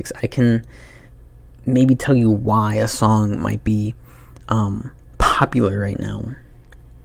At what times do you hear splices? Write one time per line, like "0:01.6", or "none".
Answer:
none

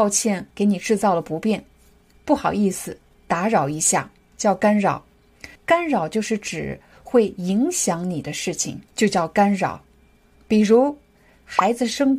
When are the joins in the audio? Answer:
0:04.3
0:05.6
0:08.9

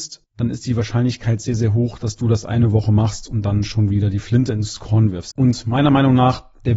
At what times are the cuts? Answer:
0:05.3

